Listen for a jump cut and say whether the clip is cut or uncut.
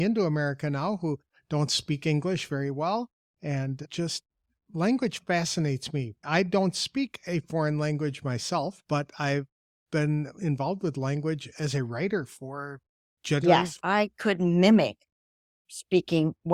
cut